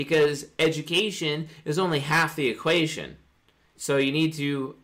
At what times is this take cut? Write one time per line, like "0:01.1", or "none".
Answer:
0:03.7